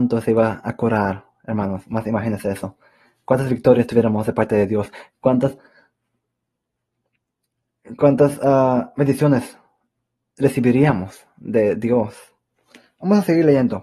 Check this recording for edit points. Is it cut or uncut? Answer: uncut